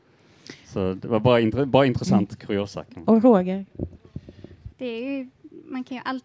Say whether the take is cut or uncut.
cut